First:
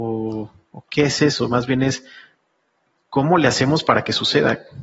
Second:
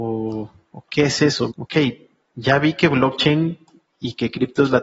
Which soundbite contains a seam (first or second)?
second